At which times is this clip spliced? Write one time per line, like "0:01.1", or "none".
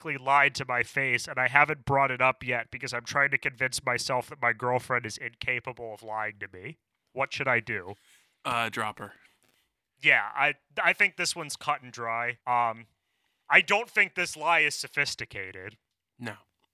0:12.4